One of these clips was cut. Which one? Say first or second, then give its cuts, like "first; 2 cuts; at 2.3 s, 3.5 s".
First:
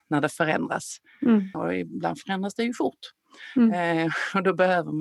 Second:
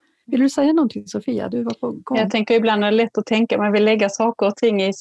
first; 1 cut; at 1.5 s